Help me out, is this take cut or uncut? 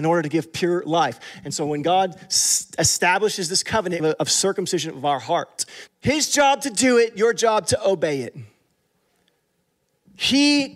cut